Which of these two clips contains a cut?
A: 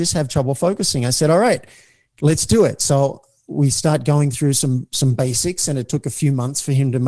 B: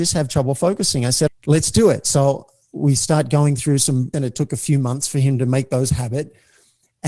B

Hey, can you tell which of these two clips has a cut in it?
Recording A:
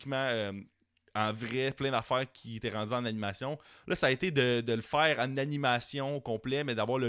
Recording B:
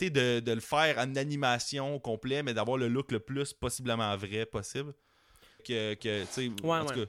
B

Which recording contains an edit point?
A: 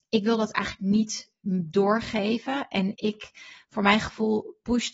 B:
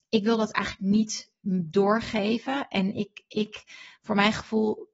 A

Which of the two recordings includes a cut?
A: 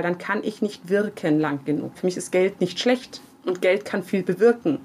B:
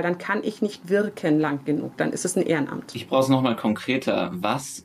A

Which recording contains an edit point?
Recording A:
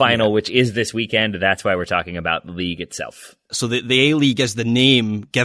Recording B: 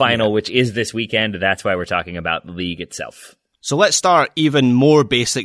A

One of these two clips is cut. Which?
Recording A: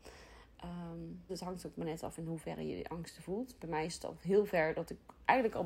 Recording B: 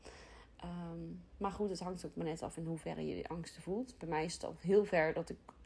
A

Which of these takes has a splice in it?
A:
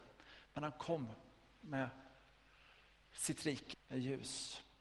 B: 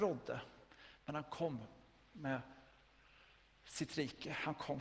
A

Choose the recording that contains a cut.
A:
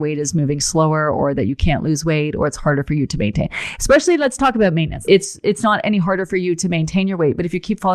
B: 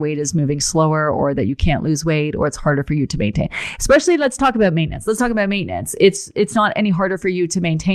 A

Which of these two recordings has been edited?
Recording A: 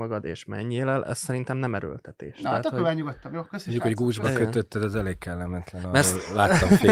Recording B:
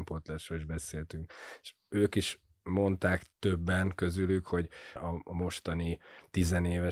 B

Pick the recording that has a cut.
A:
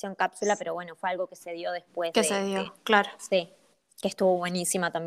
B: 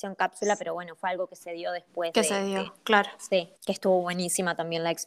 B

